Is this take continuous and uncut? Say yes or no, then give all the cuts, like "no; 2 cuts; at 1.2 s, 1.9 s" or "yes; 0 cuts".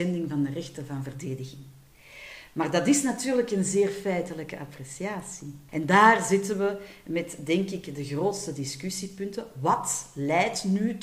no; 1 cut; at 5.7 s